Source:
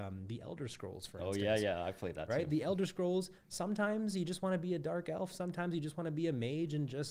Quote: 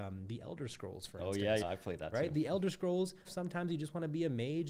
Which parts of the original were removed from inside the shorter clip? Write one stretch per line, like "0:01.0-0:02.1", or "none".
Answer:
0:01.6-0:01.8
0:03.4-0:05.3